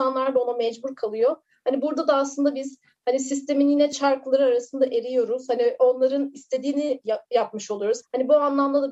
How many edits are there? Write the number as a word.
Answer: one